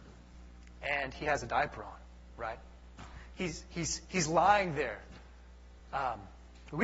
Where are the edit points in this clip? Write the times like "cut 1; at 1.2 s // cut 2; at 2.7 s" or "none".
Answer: none